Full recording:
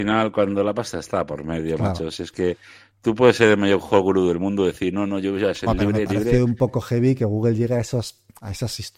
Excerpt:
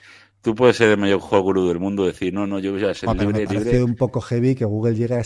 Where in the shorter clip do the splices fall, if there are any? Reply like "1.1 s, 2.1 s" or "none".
none